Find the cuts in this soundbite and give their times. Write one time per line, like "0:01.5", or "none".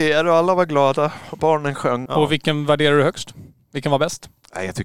0:02.1